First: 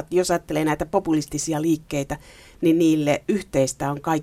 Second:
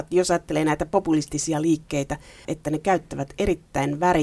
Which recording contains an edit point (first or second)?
second